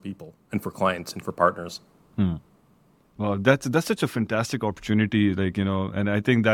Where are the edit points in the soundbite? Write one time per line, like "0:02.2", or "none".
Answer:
0:03.1